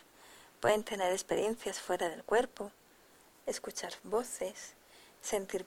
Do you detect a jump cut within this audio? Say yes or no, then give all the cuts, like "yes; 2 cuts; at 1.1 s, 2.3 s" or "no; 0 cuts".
no; 0 cuts